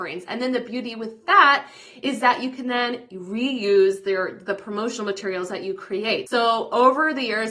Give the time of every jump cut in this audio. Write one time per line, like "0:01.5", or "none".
0:06.3